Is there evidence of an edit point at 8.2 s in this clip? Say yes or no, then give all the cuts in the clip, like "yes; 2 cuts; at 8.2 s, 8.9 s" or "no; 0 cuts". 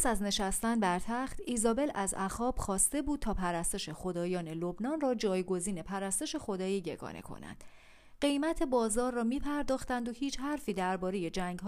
yes; 1 cut; at 8.2 s